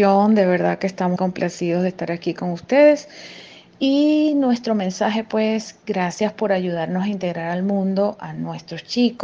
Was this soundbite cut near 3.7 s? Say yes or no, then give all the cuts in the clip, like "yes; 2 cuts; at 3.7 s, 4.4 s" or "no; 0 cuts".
no; 1 cut; at 1.2 s